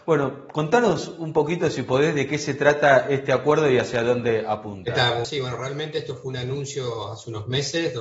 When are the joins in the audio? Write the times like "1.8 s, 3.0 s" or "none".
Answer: 5.2 s